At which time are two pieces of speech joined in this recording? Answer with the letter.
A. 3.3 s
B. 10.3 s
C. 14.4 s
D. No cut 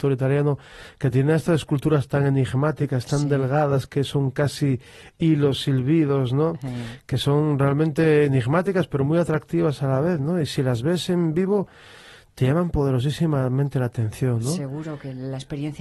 D